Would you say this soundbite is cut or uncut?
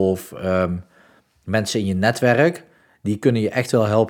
uncut